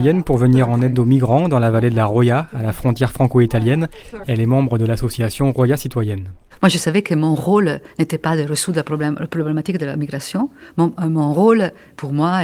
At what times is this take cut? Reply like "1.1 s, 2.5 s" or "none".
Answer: 4.2 s, 11.0 s